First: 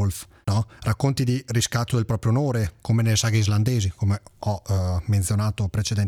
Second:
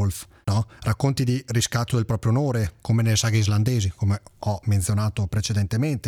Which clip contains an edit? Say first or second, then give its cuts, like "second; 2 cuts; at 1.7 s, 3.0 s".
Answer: second; 1 cut; at 4.6 s